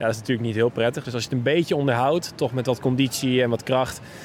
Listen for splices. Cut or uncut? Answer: uncut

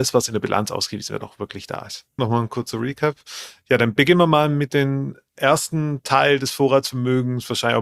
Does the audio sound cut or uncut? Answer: cut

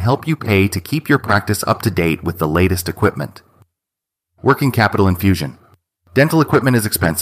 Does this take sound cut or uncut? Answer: cut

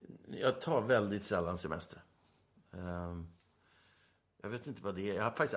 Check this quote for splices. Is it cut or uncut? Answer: uncut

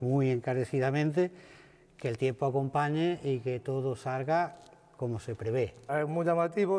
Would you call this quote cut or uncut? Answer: cut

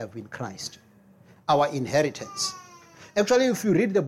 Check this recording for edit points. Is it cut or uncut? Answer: uncut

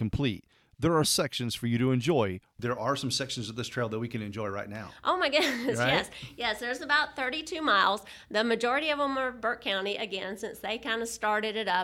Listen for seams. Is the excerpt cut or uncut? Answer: cut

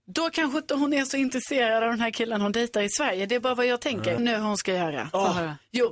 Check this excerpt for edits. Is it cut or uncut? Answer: cut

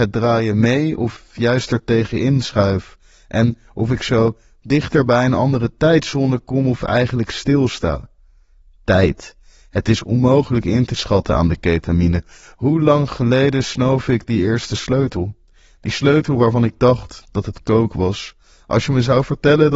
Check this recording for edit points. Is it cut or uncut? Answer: uncut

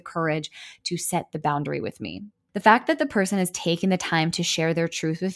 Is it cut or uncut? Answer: uncut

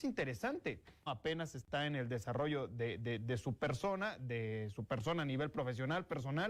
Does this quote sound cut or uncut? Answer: cut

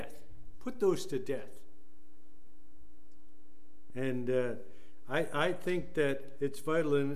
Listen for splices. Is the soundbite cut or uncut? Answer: cut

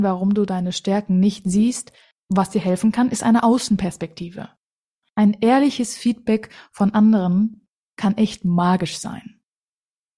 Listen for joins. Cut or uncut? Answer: cut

